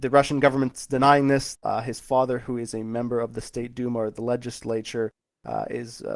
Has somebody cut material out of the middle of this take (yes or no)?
yes